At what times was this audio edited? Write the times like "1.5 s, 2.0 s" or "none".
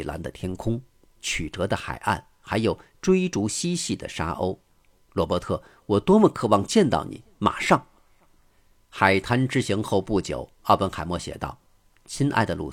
none